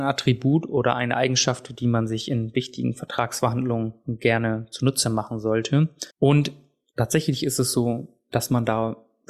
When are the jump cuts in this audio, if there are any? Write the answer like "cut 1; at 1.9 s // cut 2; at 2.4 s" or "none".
cut 1; at 6.1 s